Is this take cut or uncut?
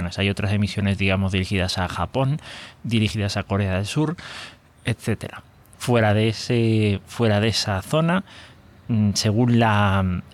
cut